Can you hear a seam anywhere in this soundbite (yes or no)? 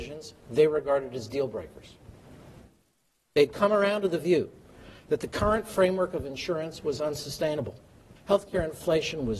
yes